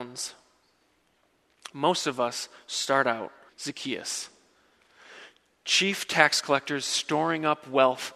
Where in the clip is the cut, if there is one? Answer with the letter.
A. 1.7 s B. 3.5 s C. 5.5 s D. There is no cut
B